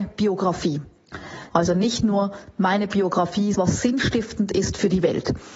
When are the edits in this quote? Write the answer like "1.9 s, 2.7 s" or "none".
1.5 s, 3.5 s

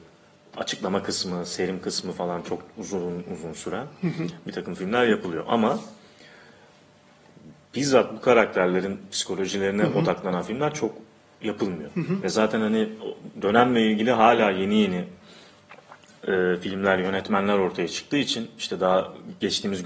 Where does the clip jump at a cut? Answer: none

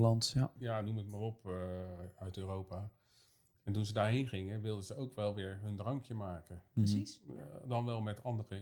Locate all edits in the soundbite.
none

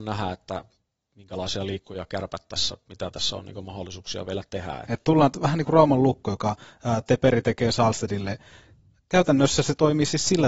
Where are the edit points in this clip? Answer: 4.9 s

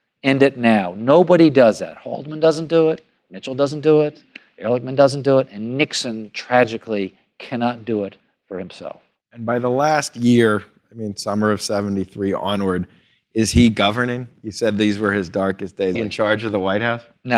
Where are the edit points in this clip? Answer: 15.9 s

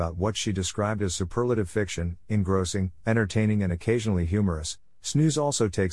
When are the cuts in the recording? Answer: none

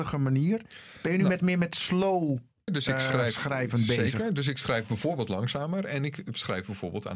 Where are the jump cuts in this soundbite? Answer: 2.7 s

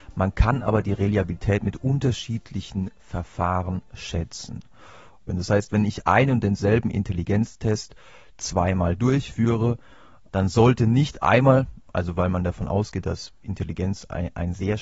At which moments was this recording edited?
5.3 s, 10.3 s

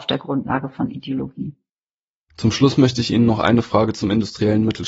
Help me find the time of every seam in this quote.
none

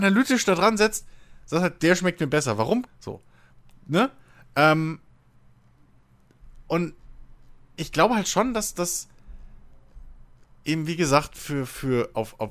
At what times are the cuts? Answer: 2.9 s

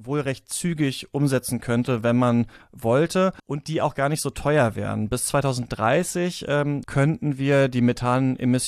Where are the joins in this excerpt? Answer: 3.4 s, 6.8 s

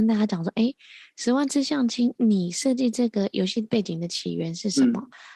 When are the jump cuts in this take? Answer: none

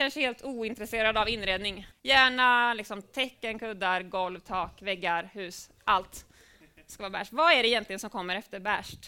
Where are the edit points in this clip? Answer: 1.9 s

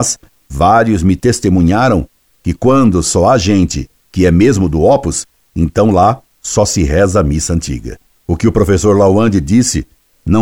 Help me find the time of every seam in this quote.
8.1 s

